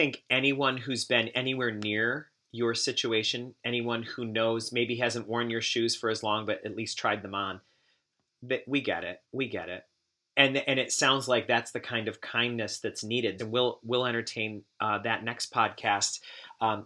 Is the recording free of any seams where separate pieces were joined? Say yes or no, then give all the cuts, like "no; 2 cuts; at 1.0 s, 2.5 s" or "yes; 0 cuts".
no; 2 cuts; at 9.2 s, 13.4 s